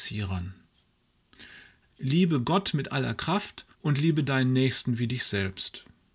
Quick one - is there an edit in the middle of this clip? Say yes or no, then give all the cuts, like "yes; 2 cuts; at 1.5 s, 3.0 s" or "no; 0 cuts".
yes; 2 cuts; at 1.8 s, 3.7 s